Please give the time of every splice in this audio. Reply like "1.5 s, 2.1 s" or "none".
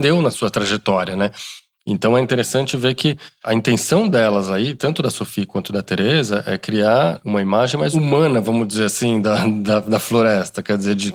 none